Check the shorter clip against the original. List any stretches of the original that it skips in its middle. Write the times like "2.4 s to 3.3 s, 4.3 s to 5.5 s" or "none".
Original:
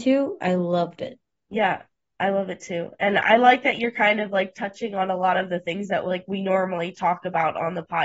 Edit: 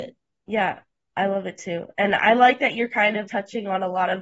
4.3 s to 4.5 s